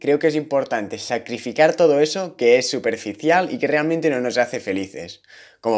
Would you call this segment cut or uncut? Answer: uncut